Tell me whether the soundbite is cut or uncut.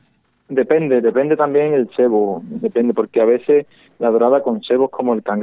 uncut